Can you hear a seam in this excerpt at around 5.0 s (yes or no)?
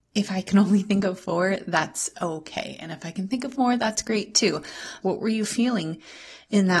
yes